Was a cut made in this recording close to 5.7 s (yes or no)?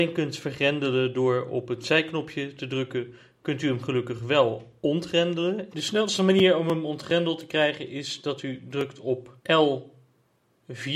yes